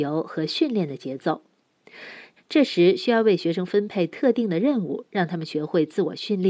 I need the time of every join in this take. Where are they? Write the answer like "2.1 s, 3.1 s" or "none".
2.4 s